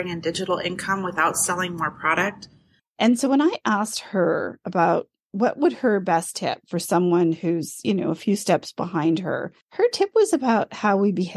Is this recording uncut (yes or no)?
no